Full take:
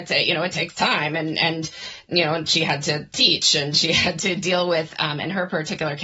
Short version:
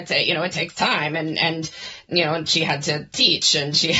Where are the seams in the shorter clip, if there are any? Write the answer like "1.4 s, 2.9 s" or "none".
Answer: none